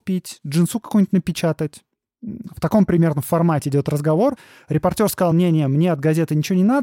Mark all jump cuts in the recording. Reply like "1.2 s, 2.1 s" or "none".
none